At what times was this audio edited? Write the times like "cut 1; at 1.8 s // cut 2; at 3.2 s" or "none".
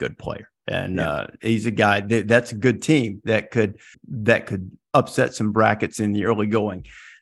cut 1; at 3.9 s